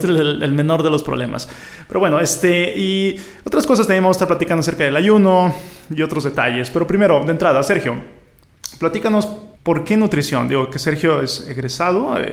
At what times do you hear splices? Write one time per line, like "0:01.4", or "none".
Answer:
0:09.5

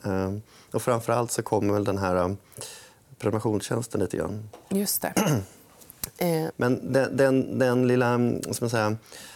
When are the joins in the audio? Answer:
0:06.5

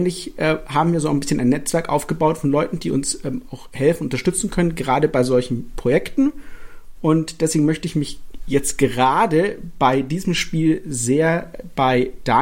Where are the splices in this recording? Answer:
none

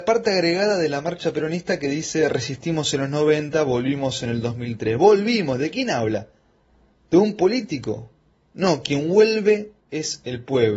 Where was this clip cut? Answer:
none

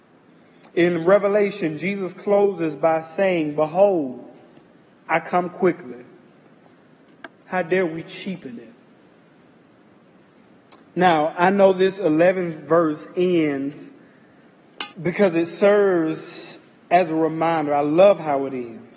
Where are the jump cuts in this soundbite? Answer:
0:07.3
0:14.9

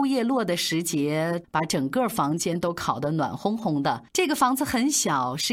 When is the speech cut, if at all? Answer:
0:01.4
0:04.1

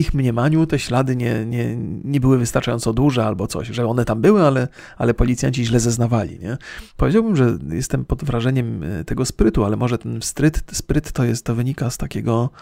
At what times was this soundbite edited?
0:06.9

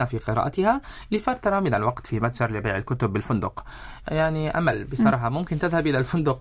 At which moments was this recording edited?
0:04.0

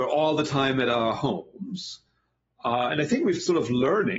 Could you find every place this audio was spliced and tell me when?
none

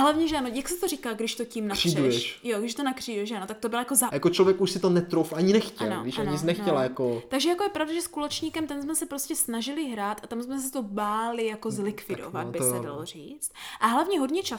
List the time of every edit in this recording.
0:04.1

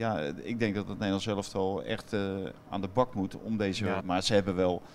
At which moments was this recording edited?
0:04.0

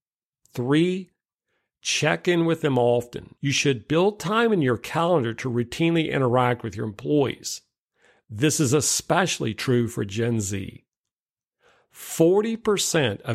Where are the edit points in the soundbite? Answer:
0:03.4

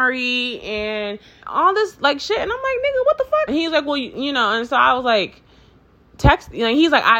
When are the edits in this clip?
0:01.4
0:03.5

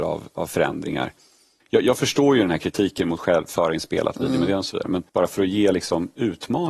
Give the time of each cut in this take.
0:01.6
0:05.1

